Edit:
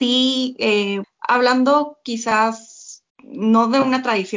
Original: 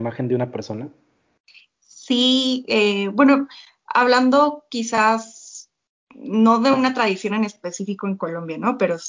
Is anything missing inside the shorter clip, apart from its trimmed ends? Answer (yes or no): yes